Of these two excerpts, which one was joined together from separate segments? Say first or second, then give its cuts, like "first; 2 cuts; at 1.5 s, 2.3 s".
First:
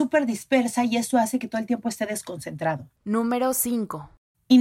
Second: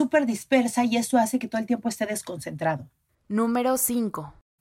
first; 1 cut; at 3.0 s